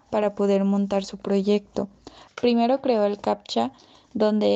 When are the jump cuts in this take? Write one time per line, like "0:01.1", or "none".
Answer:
0:02.3